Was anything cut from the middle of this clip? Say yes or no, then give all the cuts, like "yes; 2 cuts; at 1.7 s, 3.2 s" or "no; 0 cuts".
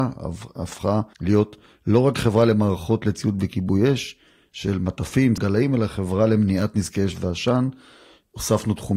yes; 2 cuts; at 1.1 s, 5.4 s